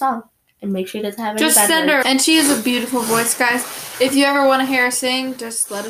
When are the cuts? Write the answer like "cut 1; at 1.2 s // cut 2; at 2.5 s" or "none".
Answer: cut 1; at 2.0 s